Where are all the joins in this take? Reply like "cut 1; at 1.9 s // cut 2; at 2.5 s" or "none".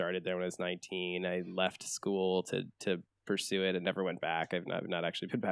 none